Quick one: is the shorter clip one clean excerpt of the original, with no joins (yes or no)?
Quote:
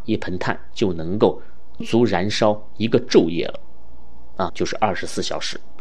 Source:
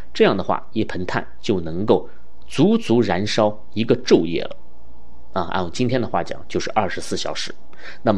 no